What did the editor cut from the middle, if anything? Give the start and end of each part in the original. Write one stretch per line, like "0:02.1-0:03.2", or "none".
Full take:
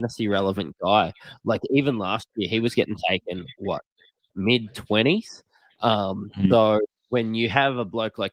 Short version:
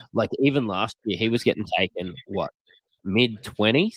none

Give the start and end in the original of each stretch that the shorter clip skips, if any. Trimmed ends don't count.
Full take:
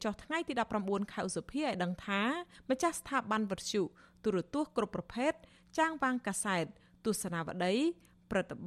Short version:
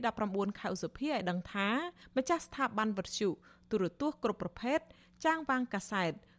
none

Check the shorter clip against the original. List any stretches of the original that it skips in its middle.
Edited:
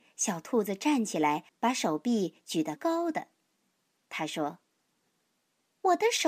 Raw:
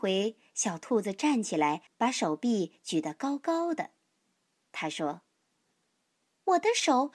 0:03.1-0:03.4

